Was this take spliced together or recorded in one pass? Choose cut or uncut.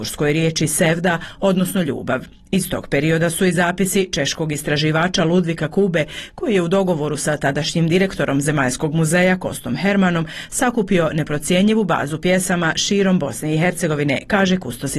uncut